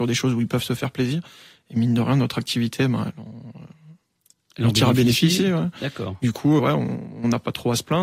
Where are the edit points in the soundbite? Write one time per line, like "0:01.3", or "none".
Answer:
0:06.6